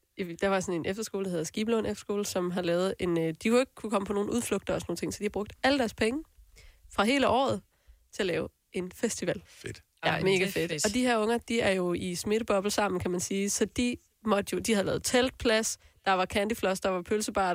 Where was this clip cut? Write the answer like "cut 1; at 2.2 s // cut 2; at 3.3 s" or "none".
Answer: cut 1; at 9.5 s